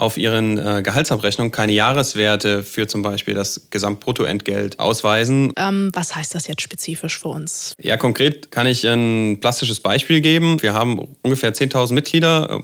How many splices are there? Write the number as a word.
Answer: two